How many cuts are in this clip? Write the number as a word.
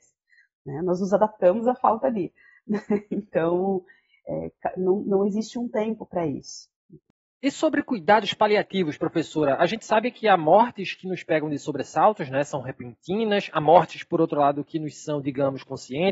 zero